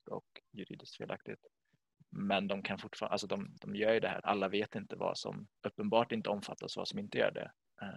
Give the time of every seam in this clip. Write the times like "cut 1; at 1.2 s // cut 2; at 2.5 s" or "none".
cut 1; at 4.2 s // cut 2; at 5.6 s